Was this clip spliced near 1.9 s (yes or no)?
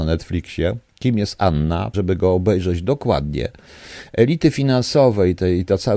yes